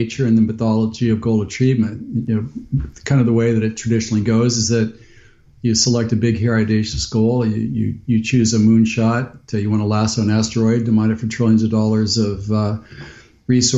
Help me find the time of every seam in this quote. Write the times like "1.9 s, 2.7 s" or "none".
none